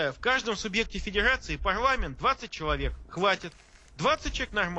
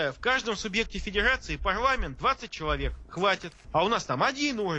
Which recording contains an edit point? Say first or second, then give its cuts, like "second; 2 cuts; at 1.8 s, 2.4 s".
second; 1 cut; at 3.6 s